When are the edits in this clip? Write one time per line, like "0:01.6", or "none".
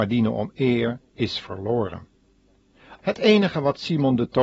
0:01.0
0:03.0